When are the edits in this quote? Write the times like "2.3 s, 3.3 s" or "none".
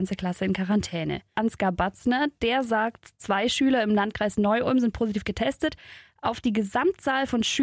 1.3 s